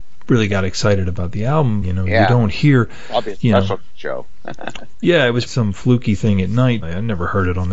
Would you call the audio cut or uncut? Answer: cut